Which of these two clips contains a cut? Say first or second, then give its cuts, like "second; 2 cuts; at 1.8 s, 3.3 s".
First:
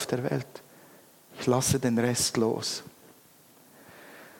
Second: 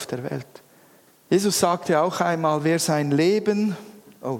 second; 1 cut; at 1.1 s